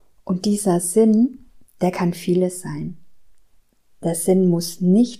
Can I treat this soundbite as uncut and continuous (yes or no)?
yes